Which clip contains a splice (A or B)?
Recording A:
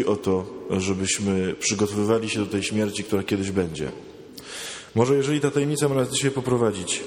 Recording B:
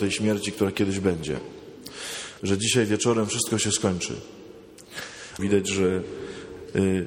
B